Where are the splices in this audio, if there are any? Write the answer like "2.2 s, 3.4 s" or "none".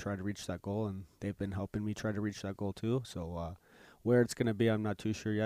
none